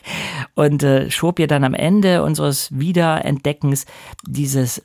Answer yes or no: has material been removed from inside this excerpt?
no